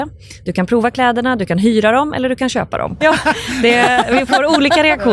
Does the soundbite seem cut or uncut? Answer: cut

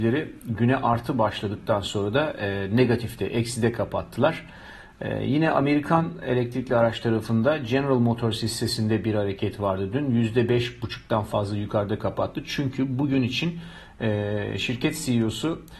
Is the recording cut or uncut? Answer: uncut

